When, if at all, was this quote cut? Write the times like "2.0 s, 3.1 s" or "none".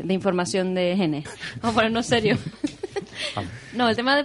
1.2 s